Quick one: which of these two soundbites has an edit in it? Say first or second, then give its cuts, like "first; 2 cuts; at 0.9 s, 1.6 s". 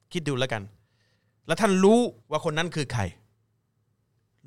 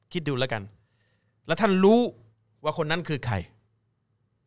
first; 1 cut; at 2.2 s